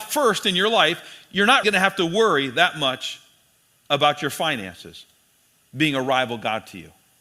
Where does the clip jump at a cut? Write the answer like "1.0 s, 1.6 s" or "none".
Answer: 1.6 s